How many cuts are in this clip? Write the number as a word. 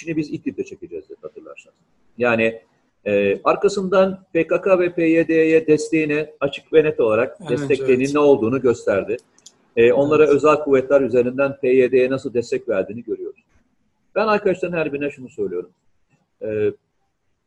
zero